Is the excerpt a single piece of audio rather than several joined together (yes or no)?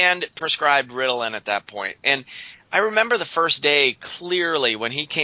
yes